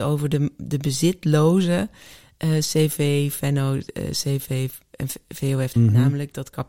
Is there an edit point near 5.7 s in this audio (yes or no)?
yes